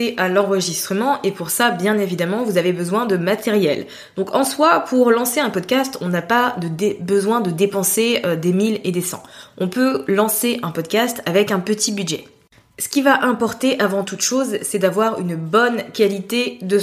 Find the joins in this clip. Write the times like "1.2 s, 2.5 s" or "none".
none